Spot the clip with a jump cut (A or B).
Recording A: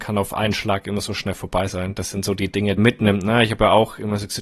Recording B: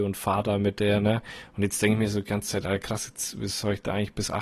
A